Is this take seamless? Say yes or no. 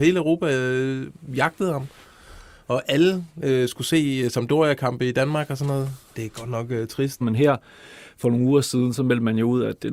no